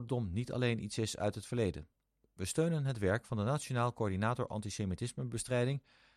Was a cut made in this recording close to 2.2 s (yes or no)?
no